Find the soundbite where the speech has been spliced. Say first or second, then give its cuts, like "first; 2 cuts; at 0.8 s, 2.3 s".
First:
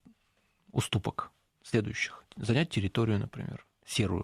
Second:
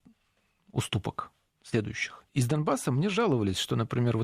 second; 1 cut; at 2.3 s